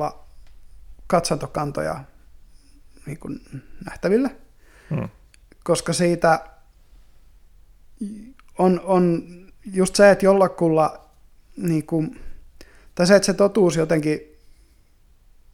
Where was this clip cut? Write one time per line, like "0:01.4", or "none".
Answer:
none